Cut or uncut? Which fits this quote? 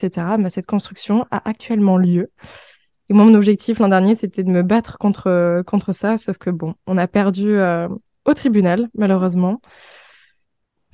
uncut